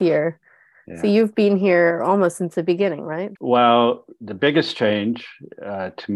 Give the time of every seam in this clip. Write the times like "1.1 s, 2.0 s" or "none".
3.3 s